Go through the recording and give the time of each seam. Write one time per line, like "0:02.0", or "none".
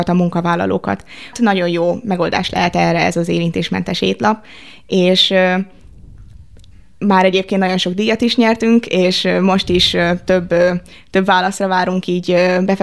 0:01.3